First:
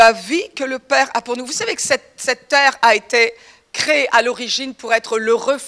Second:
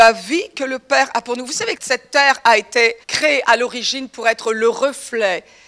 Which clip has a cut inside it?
second; 2 cuts; at 1.8 s, 3.0 s

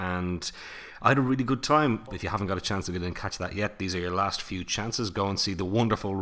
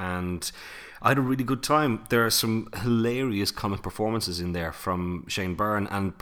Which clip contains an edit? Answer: first; 1 cut; at 2.1 s

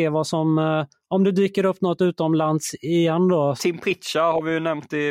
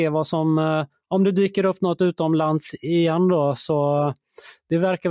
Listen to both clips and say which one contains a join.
first; 1 cut; at 3.6 s

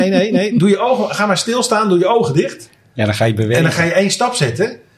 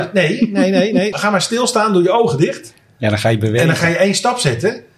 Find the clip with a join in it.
second; 1 cut; at 1.1 s

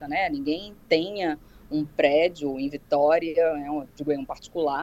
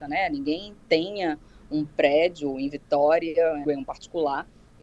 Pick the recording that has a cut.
second; 1 cut; at 3.6 s

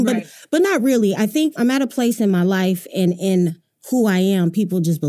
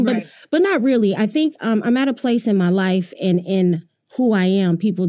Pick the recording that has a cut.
first; 1 cut; at 1.6 s

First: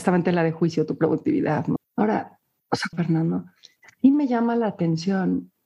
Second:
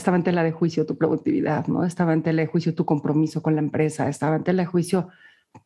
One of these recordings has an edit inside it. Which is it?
first; 2 cuts; at 1.8 s, 2.9 s

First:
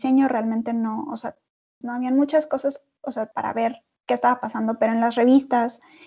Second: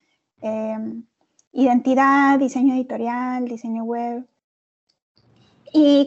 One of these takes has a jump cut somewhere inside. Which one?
first; 2 cuts; at 1.8 s, 3.3 s

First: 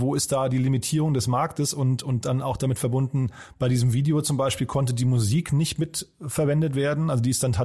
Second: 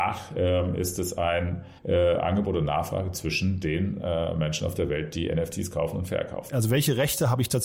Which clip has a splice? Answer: second; 2 cuts; at 1.8 s, 6.5 s

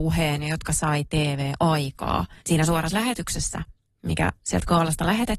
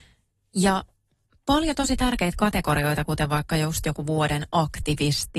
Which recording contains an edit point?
first; 1 cut; at 2.4 s

